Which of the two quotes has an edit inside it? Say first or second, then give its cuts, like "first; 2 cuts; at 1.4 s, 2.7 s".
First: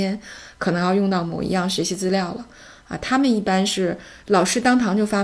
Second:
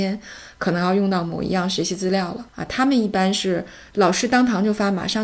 second; 1 cut; at 2.5 s